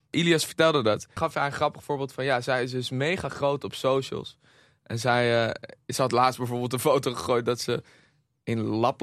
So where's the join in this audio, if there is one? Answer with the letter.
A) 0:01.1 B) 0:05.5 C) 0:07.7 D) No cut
D